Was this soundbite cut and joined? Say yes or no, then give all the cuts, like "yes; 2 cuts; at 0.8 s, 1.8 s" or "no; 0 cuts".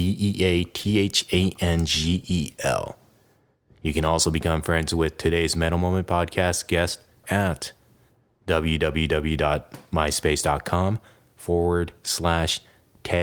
yes; 1 cut; at 7.2 s